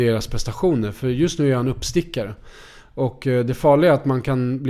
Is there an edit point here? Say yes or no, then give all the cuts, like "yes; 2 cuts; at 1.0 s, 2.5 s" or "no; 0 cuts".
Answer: no; 0 cuts